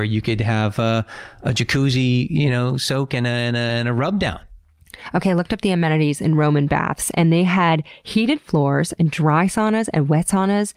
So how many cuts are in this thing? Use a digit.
0